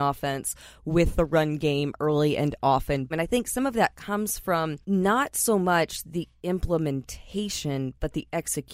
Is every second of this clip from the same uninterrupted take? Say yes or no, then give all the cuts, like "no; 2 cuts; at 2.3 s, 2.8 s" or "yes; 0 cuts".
no; 2 cuts; at 3.1 s, 4.8 s